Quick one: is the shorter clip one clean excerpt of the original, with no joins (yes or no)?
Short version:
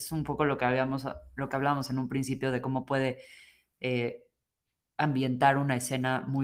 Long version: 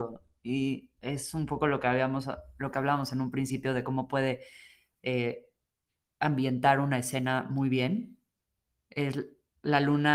yes